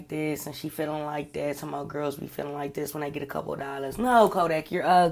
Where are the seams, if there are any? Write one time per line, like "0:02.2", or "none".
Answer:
none

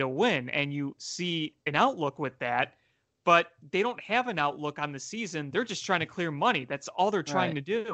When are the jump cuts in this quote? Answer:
none

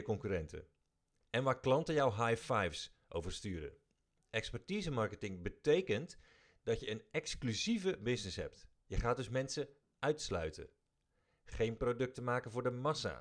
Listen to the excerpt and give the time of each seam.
0:04.2

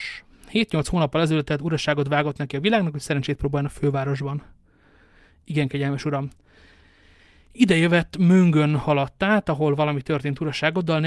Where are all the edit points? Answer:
none

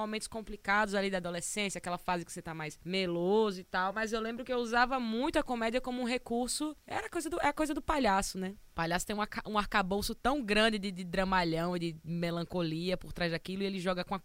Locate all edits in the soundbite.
none

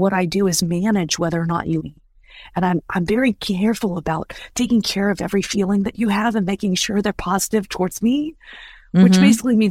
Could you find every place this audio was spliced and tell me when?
0:01.8

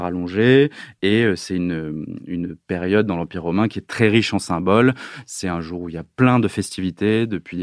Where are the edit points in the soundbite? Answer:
none

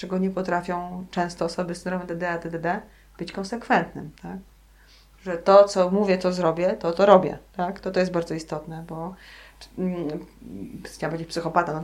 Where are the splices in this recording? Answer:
none

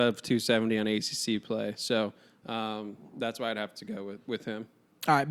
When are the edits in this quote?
none

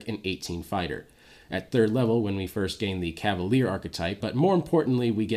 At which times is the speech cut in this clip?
0:04.2

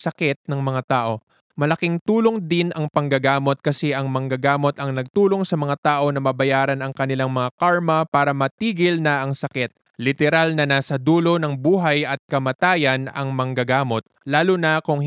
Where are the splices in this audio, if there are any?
0:09.8

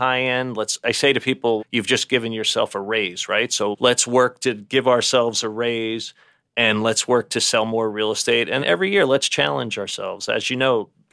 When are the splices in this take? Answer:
0:01.6
0:08.6

